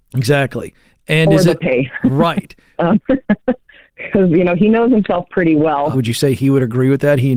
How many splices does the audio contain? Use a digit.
2